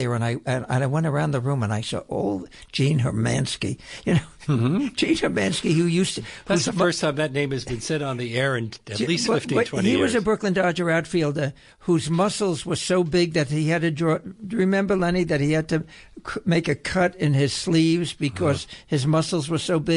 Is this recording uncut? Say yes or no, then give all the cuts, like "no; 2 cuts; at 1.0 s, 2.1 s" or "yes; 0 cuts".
yes; 0 cuts